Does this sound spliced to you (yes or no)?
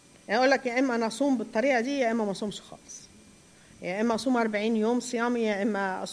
no